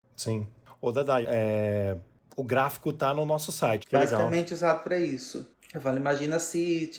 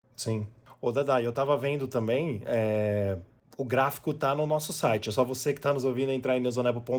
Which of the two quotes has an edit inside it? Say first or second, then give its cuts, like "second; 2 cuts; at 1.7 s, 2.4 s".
first; 2 cuts; at 1.2 s, 3.8 s